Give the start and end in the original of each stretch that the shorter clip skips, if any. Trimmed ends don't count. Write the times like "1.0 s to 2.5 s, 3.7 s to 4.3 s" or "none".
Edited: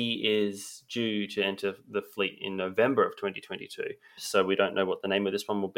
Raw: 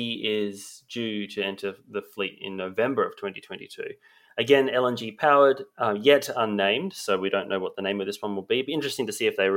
4.2 s to 6.9 s